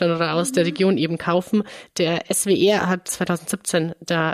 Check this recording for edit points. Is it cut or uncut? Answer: cut